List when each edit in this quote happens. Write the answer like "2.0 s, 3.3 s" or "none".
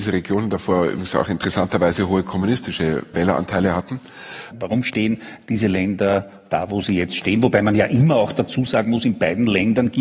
3.1 s, 4.5 s